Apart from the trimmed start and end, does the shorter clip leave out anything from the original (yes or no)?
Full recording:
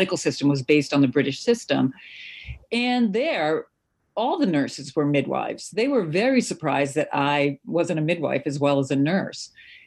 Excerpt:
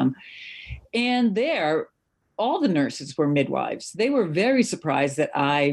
no